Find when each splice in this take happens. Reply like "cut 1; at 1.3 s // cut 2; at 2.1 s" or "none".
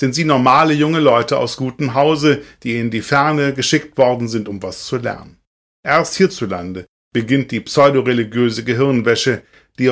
none